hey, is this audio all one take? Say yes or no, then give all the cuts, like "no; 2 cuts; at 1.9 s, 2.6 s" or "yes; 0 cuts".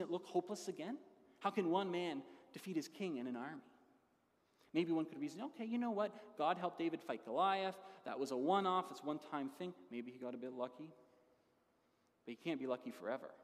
yes; 0 cuts